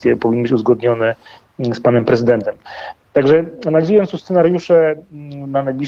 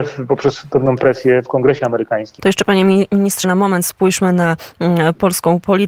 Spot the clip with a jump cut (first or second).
second